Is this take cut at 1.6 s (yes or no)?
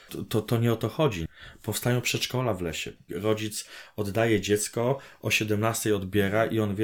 no